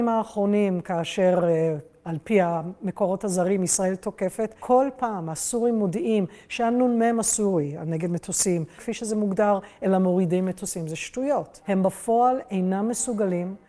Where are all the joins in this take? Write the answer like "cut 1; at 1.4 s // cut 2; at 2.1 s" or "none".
cut 1; at 8.8 s